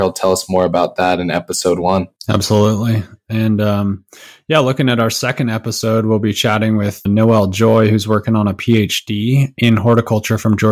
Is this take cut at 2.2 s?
yes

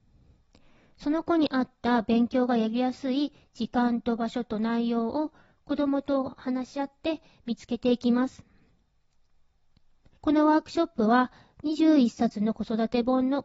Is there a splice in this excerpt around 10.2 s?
yes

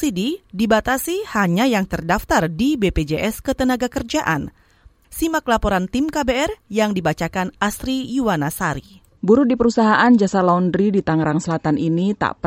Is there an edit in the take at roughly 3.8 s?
no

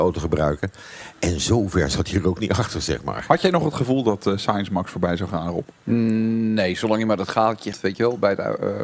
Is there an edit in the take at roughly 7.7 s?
yes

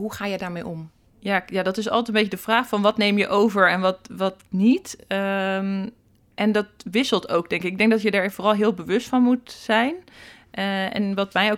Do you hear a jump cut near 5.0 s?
no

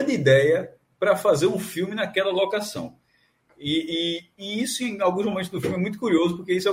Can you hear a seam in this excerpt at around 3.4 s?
yes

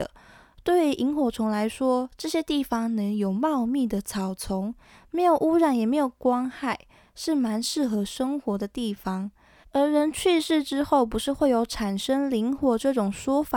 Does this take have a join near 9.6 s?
yes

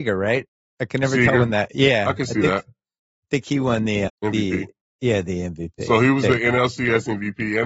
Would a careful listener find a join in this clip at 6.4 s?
no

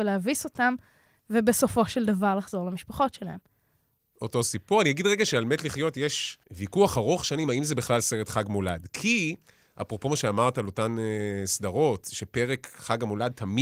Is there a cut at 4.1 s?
yes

